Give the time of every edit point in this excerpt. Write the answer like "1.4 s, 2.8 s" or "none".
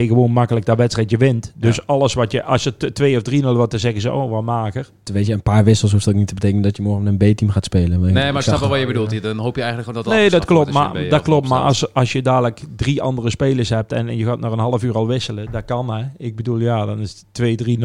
5.1 s